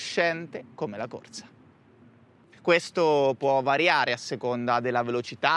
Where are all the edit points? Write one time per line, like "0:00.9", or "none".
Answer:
0:02.5